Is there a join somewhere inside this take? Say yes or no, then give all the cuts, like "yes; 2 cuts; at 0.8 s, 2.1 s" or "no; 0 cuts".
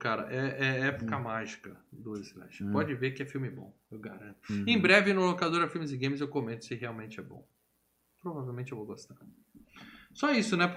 no; 0 cuts